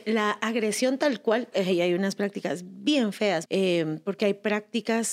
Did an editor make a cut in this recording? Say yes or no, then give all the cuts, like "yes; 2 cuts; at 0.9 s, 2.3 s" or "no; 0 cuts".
yes; 2 cuts; at 1.5 s, 3.4 s